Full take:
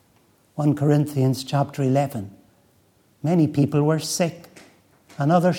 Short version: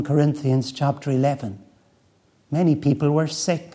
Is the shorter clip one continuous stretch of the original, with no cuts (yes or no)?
yes